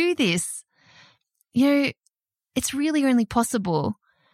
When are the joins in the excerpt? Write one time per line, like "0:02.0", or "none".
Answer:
none